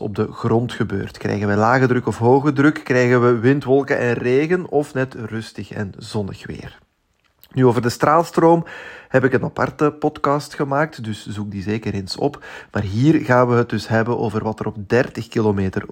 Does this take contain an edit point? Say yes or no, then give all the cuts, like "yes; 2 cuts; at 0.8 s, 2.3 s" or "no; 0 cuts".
no; 0 cuts